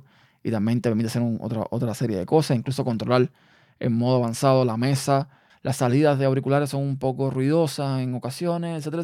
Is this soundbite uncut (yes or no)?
no